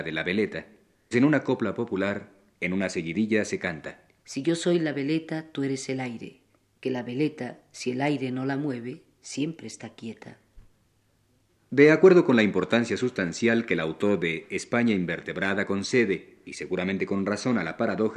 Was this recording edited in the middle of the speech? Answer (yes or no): yes